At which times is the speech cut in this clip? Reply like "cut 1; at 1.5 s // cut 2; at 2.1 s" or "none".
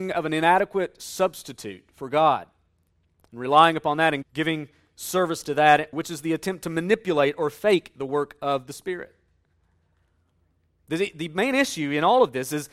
cut 1; at 4.2 s // cut 2; at 5.9 s